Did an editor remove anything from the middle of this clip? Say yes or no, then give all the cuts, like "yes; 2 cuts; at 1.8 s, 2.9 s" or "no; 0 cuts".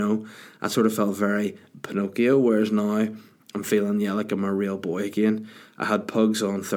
no; 0 cuts